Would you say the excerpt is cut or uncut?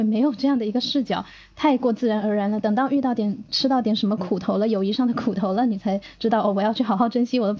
uncut